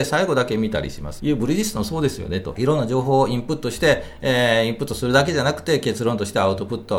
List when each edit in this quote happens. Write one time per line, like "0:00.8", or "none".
0:01.2
0:02.6